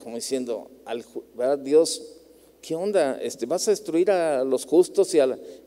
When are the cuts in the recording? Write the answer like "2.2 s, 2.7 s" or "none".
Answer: none